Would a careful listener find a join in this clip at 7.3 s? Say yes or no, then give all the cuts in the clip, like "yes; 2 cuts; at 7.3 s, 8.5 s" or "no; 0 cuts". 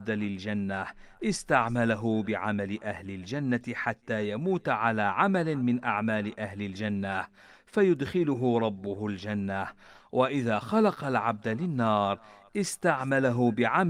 no; 0 cuts